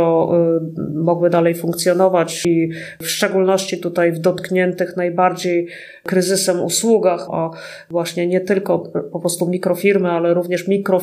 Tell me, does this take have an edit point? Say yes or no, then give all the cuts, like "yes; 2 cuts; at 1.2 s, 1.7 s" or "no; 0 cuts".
yes; 1 cut; at 7.3 s